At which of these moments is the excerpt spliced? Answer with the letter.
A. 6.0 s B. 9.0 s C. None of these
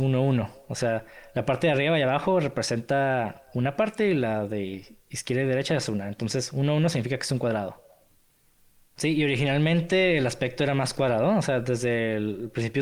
B